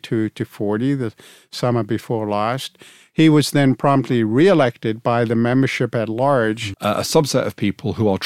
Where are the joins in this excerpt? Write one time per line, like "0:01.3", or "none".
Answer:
0:06.7